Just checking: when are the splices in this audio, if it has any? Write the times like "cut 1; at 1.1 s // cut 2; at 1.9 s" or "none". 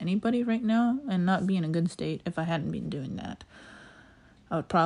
none